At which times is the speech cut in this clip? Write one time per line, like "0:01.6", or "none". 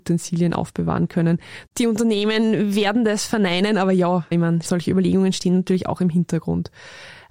0:01.7
0:04.3